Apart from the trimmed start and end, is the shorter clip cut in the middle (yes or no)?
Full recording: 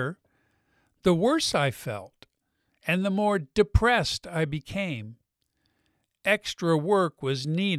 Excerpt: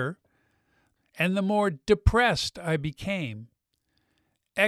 yes